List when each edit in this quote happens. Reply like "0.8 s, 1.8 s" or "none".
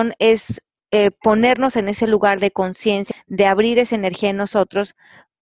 3.1 s